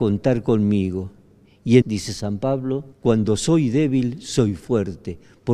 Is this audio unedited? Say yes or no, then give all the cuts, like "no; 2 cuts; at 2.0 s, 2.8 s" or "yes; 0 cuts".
no; 2 cuts; at 1.8 s, 2.9 s